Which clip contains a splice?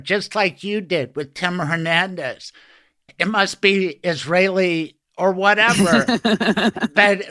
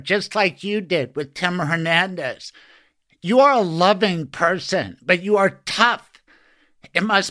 first; 1 cut; at 3.1 s

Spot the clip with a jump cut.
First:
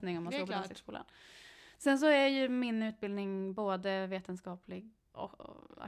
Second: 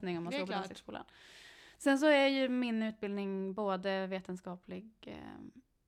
first; 1 cut; at 5.0 s

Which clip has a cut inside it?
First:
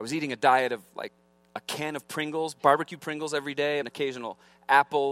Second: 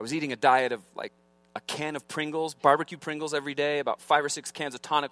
first; 1 cut; at 3.8 s

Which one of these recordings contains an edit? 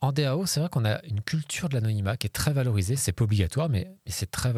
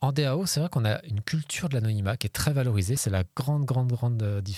second; 1 cut; at 3.0 s

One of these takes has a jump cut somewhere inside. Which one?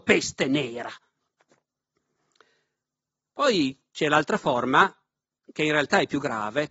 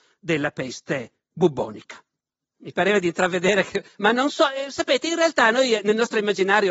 second; 1 cut; at 2.5 s

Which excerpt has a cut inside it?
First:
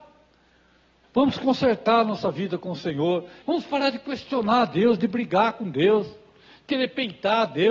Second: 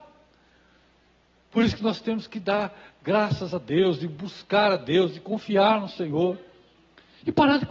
first; 2 cuts; at 1.0 s, 3.4 s

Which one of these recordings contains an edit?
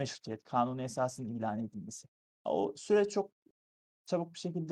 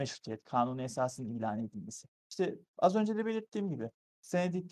second; 1 cut; at 2.1 s

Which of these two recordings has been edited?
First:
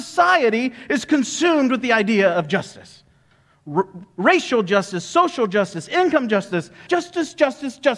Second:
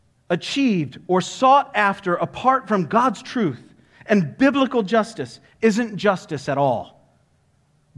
first; 1 cut; at 6.9 s

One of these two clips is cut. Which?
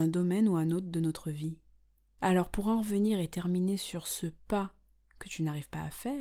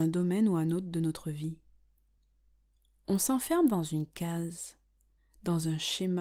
first; 1 cut; at 2.2 s

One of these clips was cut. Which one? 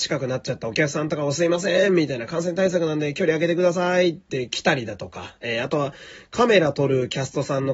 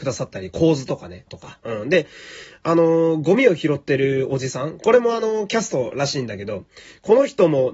second; 1 cut; at 1.3 s

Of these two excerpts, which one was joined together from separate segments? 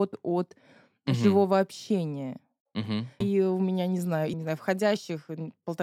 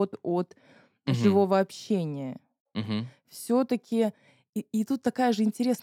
first; 2 cuts; at 3.2 s, 4.3 s

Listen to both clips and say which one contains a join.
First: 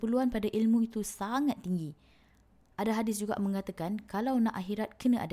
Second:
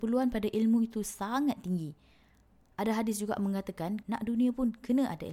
second; 1 cut; at 4.0 s

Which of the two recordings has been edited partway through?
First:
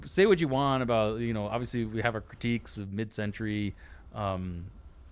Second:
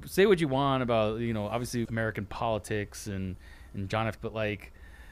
second; 2 cuts; at 1.9 s, 4.2 s

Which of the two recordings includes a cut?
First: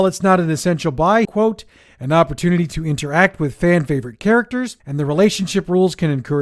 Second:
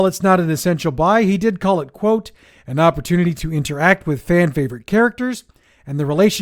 first; 2 cuts; at 1.2 s, 4.8 s

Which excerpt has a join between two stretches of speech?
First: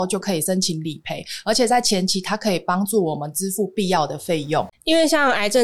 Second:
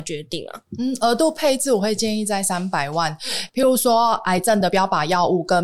second; 1 cut; at 3.5 s

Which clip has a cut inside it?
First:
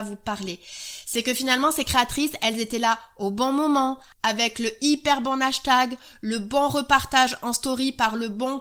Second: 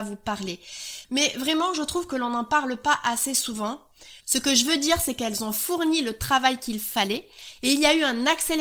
second; 2 cuts; at 1.0 s, 4.2 s

